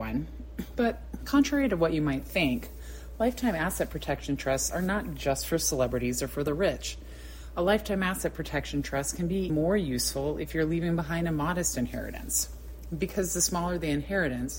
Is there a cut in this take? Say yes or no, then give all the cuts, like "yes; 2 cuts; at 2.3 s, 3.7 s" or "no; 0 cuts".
yes; 1 cut; at 9.5 s